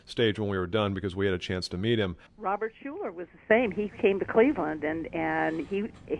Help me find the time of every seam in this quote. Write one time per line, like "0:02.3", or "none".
0:02.3